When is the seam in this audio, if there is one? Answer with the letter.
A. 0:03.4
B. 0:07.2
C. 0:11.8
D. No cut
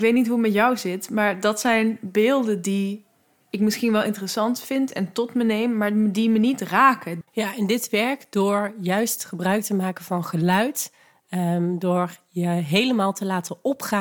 B